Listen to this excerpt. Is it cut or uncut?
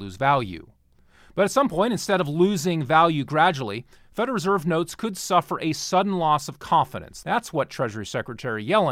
uncut